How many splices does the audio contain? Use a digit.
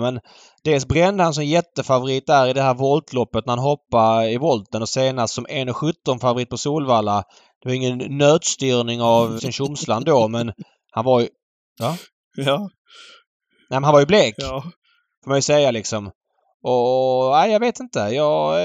1